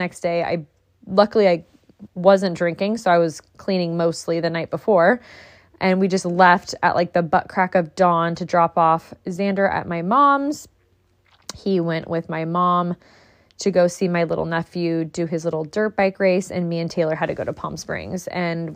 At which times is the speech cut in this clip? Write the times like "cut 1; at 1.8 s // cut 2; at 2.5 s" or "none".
cut 1; at 2.1 s